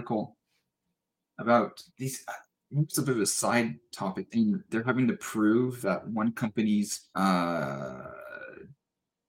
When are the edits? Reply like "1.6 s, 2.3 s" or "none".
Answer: 1.9 s, 4.3 s, 7.1 s